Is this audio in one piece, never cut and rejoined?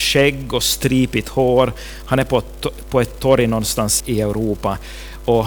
no; 1 cut; at 4.0 s

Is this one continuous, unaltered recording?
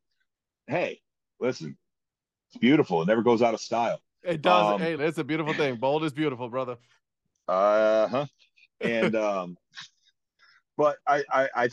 no; 1 cut; at 5.0 s

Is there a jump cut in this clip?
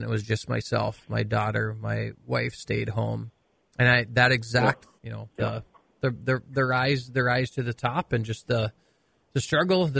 yes; 1 cut; at 5.0 s

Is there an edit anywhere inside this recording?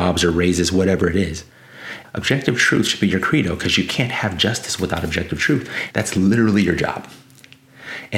yes; 2 cuts; at 2.0 s, 5.9 s

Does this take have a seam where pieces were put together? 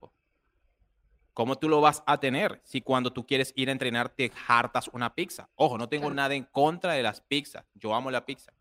no; 0 cuts

